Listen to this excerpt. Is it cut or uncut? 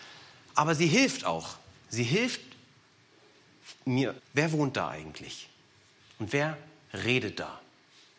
cut